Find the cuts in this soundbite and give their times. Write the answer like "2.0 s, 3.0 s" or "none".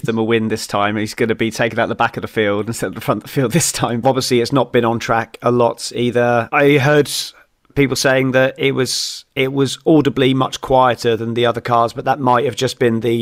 4.0 s